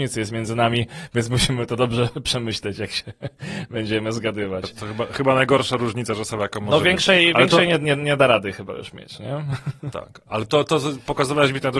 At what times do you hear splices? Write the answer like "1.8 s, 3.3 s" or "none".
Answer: none